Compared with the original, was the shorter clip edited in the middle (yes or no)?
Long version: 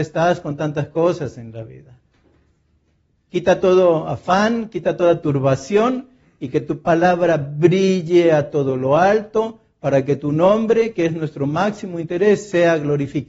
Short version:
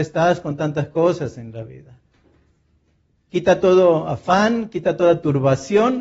no